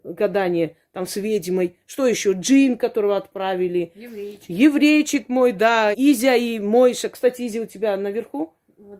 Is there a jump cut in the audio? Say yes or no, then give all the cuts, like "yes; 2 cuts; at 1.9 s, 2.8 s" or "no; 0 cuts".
yes; 1 cut; at 5.9 s